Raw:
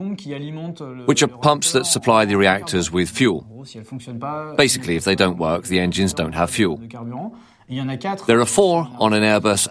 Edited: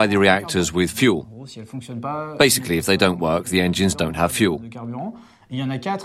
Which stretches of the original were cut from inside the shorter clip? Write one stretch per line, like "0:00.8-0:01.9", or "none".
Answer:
none